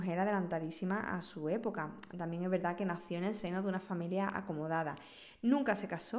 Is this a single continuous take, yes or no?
yes